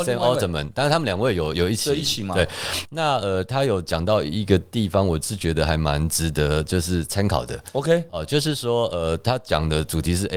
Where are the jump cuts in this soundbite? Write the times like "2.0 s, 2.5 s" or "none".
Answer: none